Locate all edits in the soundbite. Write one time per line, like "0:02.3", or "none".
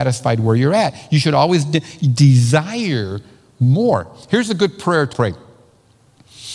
0:05.1